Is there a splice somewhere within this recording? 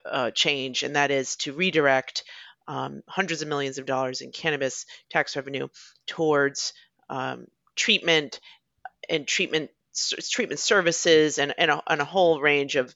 no; 0 cuts

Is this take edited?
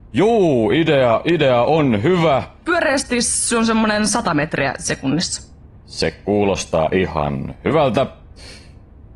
yes; 1 cut; at 2.6 s

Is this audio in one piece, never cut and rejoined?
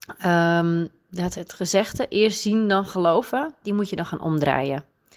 no; 1 cut; at 1.3 s

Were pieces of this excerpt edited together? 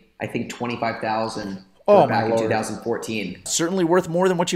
yes; 1 cut; at 3.5 s

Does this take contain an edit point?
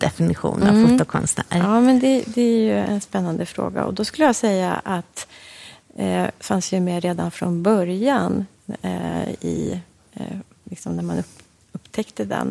yes; 2 cuts; at 6.4 s, 10.6 s

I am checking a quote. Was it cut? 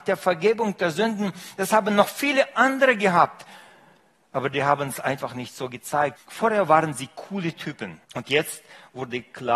yes; 2 cuts; at 6.2 s, 8.0 s

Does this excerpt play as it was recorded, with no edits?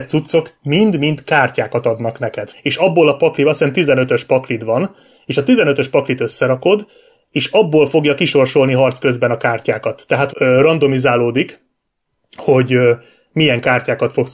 no; 2 cuts; at 2.5 s, 10.3 s

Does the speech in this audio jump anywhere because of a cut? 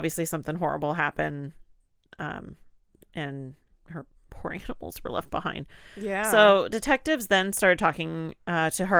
no; 0 cuts

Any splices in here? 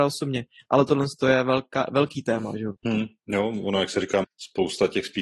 yes; 2 cuts; at 2.8 s, 4.2 s

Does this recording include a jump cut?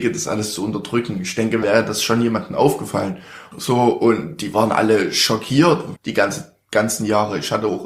yes; 3 cuts; at 1.6 s, 3.5 s, 6.0 s

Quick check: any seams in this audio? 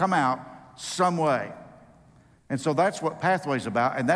no; 0 cuts

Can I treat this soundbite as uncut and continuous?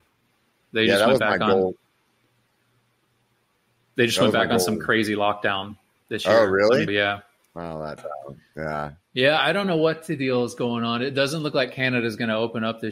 no; 2 cuts; at 6.9 s, 8.0 s

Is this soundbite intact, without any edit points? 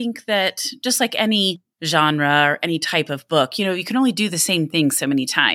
no; 1 cut; at 1.7 s

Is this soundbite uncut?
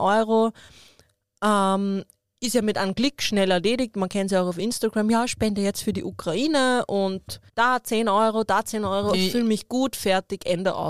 no; 2 cuts; at 7.5 s, 9.1 s

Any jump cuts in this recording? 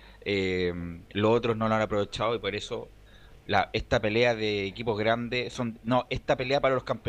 no; 0 cuts

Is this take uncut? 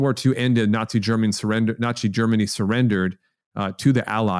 yes; 0 cuts

